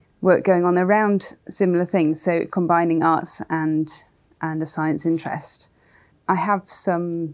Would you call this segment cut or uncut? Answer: uncut